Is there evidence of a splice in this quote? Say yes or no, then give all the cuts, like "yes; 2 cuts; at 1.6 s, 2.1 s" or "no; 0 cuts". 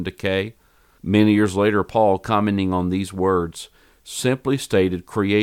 yes; 1 cut; at 1.0 s